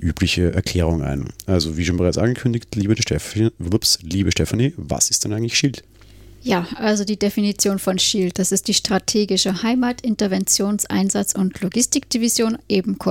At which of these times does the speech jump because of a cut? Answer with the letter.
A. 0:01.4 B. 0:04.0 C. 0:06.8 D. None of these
D